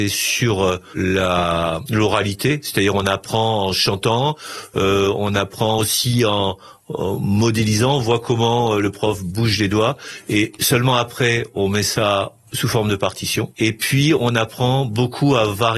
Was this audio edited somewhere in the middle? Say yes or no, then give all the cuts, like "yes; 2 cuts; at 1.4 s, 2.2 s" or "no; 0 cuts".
no; 0 cuts